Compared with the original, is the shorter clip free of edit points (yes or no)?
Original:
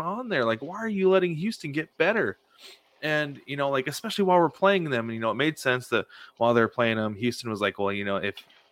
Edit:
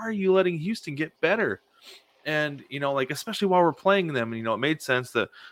yes